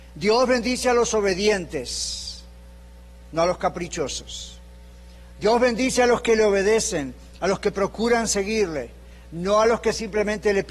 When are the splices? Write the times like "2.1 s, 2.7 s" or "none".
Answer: none